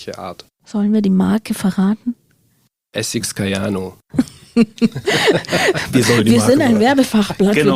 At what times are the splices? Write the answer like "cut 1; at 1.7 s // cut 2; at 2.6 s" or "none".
none